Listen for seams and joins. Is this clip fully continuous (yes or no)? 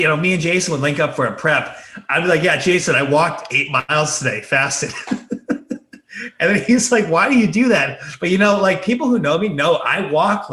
yes